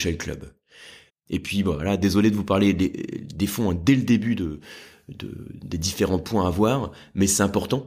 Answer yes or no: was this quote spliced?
yes